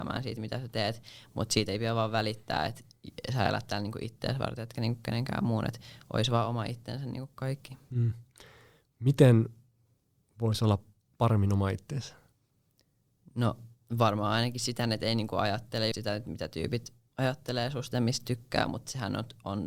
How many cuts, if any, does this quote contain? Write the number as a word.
two